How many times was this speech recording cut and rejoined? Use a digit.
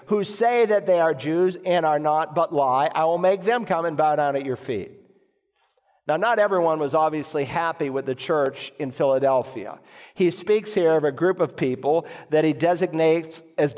0